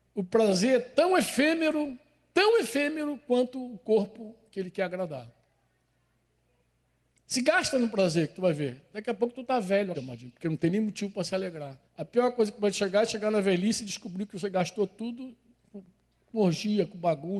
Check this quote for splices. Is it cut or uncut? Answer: cut